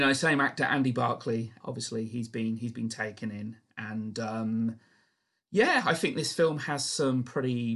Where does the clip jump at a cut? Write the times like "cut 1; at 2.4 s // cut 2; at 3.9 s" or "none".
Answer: cut 1; at 1.6 s